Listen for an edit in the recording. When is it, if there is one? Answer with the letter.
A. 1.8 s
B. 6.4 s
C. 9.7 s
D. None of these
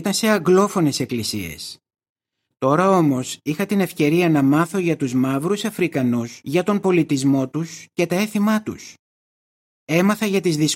B